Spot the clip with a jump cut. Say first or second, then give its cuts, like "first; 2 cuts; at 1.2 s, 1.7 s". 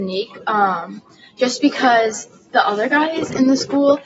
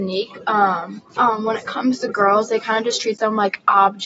second; 1 cut; at 1.1 s